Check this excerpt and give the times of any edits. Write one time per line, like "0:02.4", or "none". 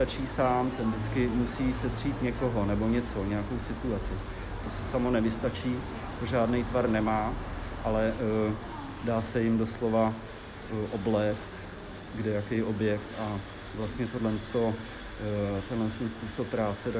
0:04.6

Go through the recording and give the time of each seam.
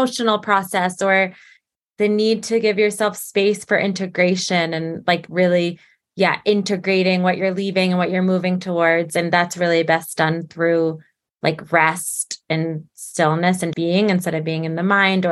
0:13.7

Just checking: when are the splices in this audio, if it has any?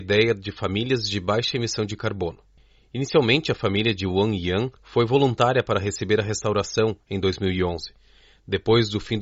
0:04.8

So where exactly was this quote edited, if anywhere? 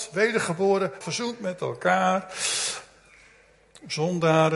0:01.0

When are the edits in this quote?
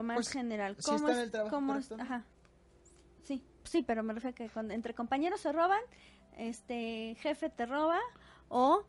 0:03.6

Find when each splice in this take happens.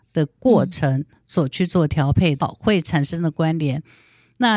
0:02.4

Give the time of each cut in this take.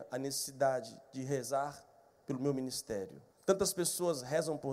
0:03.3

